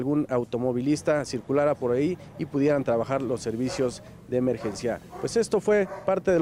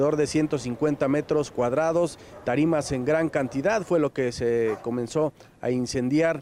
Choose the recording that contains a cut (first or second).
second